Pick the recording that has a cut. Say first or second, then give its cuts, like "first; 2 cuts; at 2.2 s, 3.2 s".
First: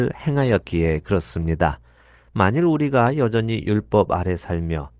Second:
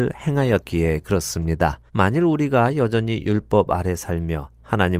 second; 1 cut; at 1.9 s